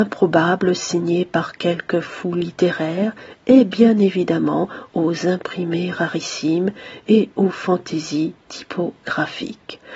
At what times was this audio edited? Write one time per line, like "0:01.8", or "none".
none